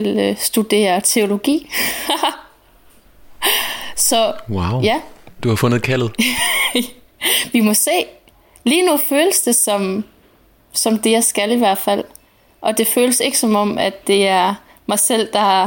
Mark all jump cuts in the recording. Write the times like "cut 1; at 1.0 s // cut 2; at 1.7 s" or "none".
none